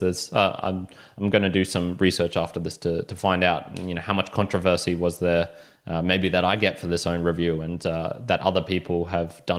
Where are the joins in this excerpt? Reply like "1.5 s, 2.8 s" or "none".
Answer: none